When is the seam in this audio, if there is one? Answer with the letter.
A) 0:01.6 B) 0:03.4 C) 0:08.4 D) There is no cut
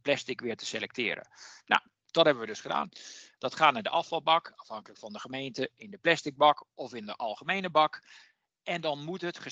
B